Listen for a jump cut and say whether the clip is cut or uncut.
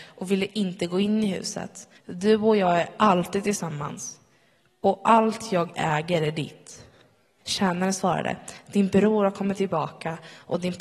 cut